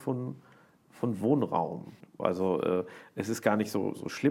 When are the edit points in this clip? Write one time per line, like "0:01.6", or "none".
0:02.2